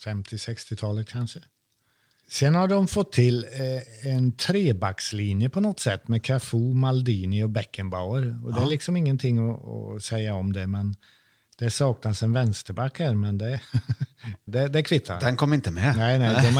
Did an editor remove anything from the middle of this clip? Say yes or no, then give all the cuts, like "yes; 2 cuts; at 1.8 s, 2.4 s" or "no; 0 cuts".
yes; 1 cut; at 14.5 s